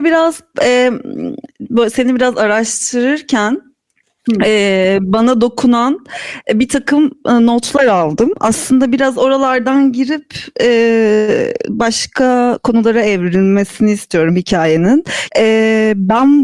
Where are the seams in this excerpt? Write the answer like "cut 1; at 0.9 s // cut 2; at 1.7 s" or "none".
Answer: cut 1; at 15.3 s